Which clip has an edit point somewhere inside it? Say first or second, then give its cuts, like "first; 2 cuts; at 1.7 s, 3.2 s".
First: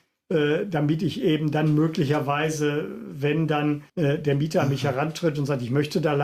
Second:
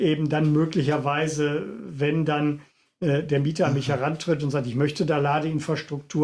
first; 1 cut; at 3.9 s